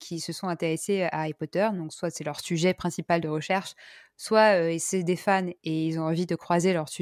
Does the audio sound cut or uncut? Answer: uncut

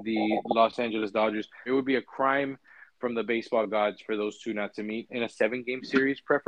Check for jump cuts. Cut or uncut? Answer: cut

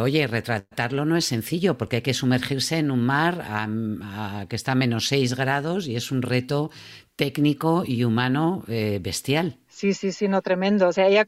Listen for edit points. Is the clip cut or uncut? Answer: uncut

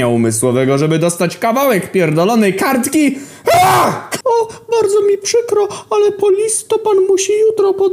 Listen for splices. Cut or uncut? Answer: cut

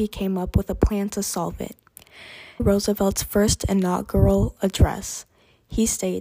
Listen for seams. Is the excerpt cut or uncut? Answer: cut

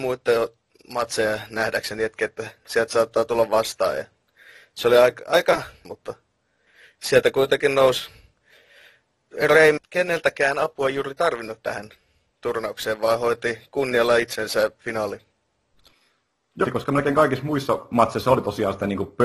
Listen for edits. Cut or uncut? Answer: cut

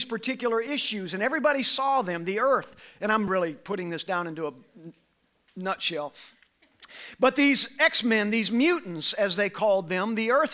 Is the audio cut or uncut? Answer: cut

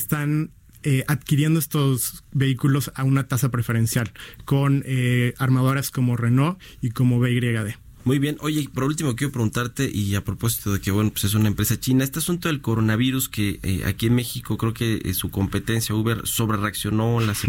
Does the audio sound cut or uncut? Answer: cut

